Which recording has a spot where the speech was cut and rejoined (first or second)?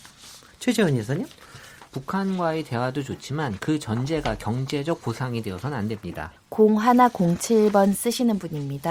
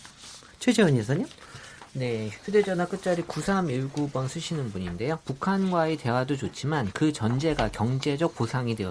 first